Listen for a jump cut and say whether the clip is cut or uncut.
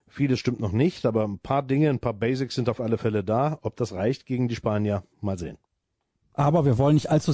uncut